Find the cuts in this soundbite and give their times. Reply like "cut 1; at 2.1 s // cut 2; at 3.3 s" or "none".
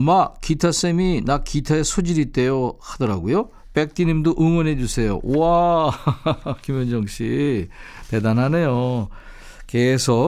none